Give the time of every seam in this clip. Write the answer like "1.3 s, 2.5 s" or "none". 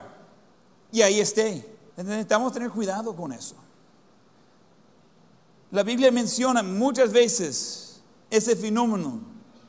1.9 s